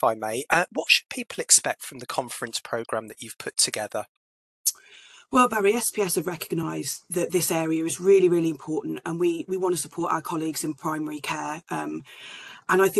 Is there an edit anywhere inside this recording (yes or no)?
no